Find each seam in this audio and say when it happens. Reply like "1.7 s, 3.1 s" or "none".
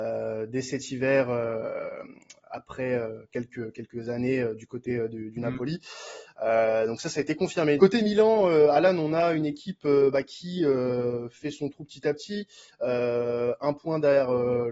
7.8 s